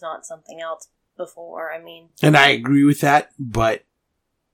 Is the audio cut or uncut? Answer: uncut